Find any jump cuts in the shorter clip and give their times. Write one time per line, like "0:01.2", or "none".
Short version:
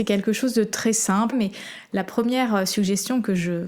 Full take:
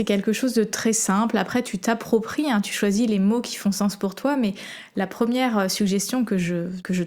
0:01.3